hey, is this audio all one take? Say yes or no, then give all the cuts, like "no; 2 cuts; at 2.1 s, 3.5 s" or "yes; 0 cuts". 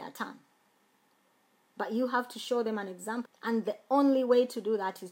no; 1 cut; at 3.3 s